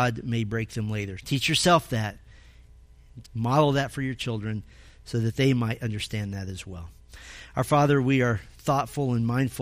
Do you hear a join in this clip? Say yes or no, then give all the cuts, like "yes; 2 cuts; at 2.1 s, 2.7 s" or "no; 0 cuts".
yes; 2 cuts; at 1.2 s, 3.2 s